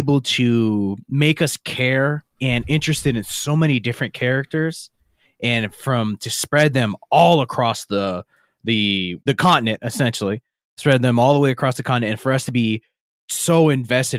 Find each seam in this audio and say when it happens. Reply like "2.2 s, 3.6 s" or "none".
2.3 s, 9.2 s